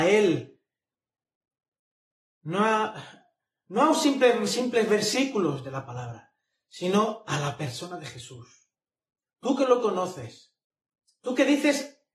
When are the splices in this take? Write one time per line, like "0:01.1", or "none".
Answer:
none